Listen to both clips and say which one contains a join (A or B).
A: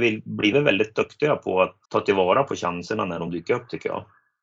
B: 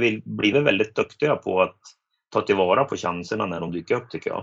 A